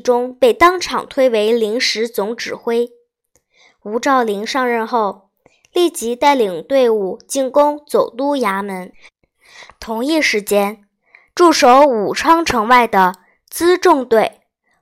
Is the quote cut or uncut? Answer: uncut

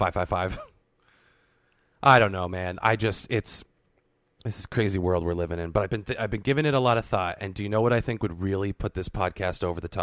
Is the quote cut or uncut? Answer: uncut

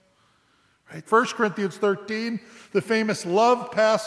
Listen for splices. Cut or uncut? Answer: cut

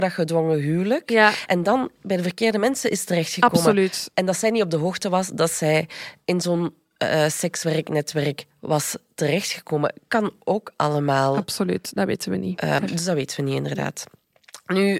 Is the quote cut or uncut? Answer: uncut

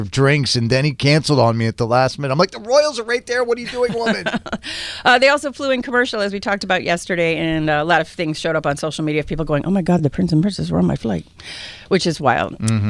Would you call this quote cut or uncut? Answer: uncut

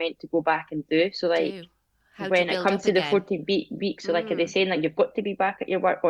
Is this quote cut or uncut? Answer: uncut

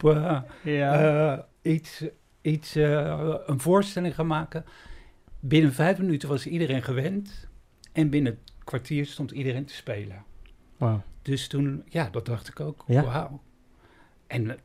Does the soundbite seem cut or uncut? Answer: uncut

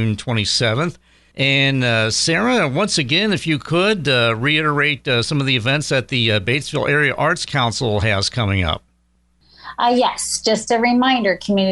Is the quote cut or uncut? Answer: cut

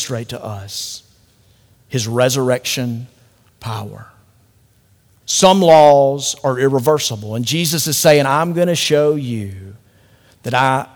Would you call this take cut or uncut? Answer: cut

